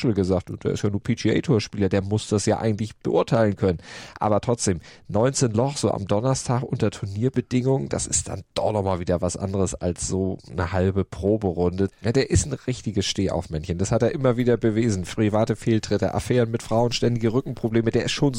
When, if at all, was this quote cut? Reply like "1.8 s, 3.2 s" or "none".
11.9 s